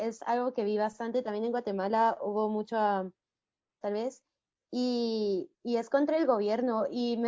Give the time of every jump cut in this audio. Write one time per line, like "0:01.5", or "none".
0:03.8
0:05.5